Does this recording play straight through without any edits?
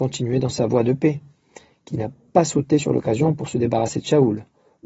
yes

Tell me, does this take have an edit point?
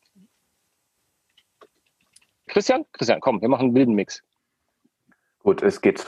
yes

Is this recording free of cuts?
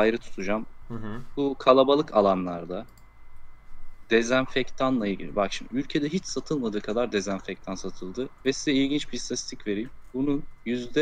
yes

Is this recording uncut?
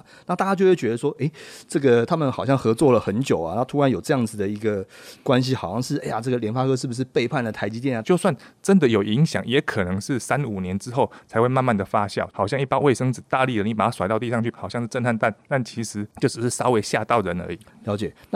no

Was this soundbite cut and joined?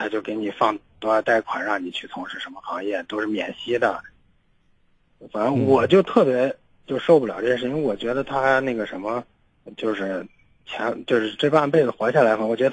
no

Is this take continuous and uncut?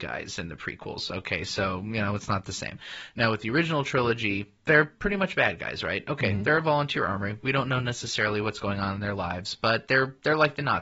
yes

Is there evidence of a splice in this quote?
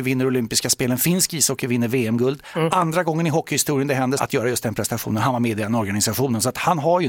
yes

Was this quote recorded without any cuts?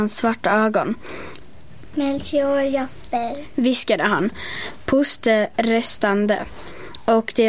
yes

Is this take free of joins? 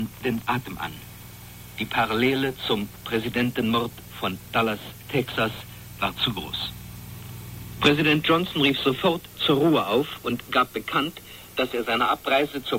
no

